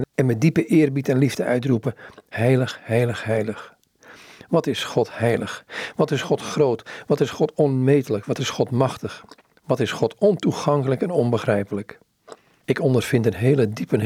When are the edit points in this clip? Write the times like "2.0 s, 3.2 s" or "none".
none

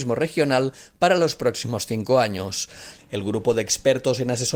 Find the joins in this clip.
3.0 s

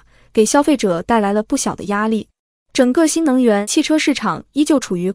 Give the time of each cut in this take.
2.5 s

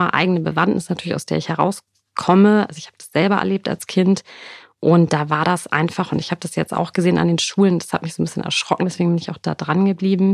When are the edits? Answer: none

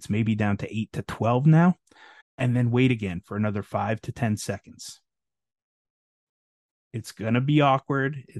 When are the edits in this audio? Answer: 2.2 s

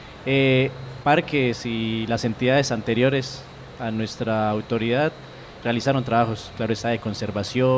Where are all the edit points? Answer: 5.6 s

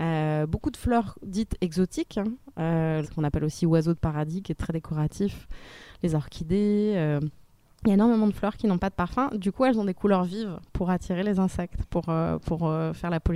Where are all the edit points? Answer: 3.0 s

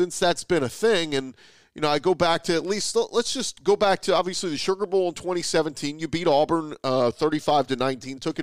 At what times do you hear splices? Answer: none

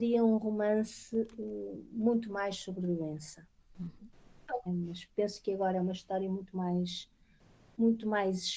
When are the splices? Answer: 4.7 s

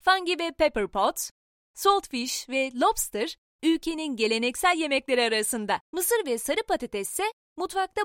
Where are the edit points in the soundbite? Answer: 1.6 s, 5.8 s

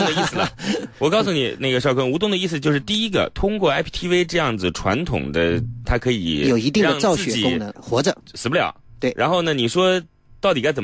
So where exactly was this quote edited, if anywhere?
5.8 s, 7.7 s

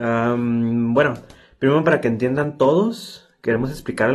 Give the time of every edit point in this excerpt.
none

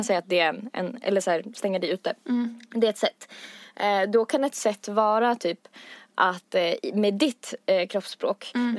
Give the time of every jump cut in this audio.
none

